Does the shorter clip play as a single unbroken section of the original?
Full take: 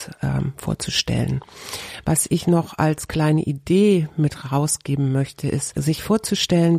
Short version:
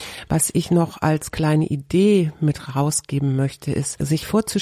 yes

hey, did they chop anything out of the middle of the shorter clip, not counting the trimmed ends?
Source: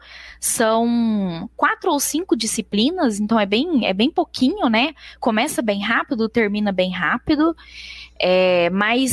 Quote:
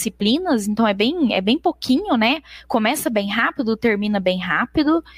no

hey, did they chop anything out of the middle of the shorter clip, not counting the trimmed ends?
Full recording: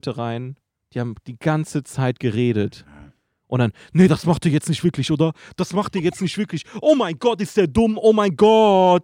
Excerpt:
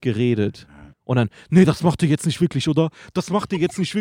yes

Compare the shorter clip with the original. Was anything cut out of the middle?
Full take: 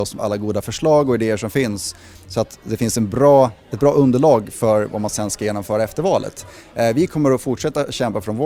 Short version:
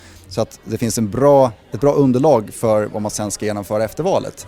no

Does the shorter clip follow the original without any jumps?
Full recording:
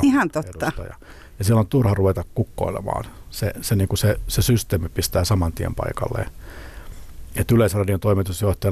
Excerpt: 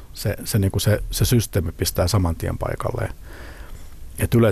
yes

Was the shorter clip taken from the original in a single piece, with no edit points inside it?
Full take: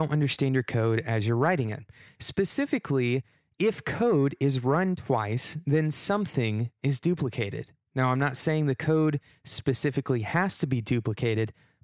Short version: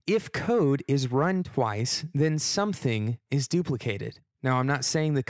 yes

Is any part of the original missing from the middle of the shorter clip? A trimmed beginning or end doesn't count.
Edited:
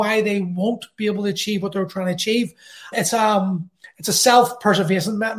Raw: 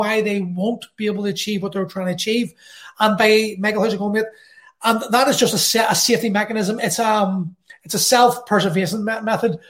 yes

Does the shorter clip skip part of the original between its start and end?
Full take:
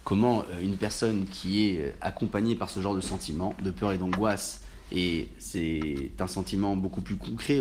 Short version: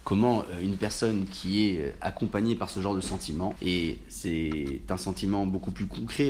yes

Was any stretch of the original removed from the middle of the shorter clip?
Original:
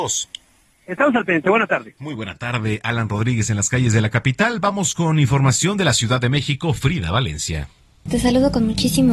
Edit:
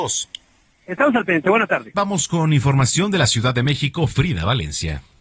yes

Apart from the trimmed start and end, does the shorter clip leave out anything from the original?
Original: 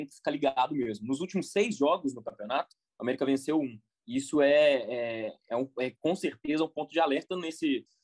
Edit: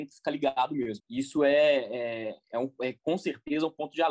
yes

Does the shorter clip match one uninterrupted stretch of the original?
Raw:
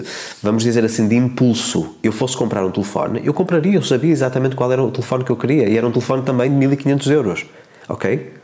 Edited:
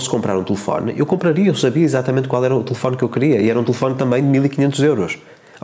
yes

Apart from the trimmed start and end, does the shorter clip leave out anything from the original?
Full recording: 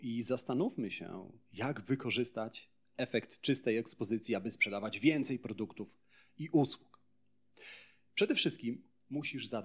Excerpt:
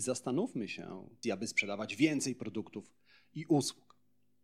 yes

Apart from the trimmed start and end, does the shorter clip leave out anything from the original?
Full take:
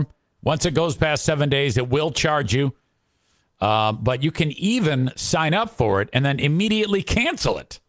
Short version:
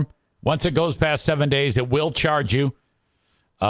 no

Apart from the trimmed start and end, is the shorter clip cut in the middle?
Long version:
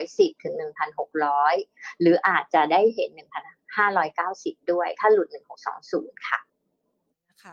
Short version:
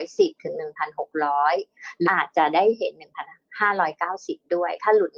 yes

